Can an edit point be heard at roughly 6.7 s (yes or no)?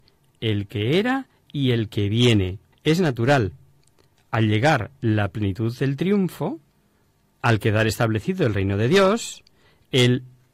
no